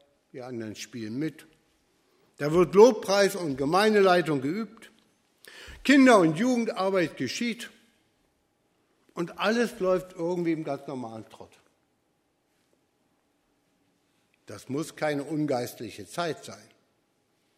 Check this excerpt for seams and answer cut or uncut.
uncut